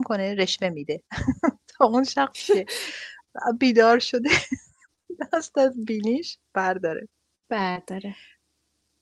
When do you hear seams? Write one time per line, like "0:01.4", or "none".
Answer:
none